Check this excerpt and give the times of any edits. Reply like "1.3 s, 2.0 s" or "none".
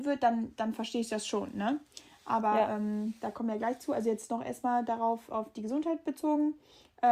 none